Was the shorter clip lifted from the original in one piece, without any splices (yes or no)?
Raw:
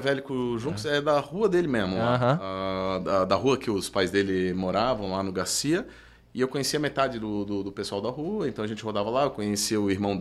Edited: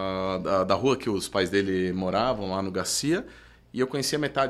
yes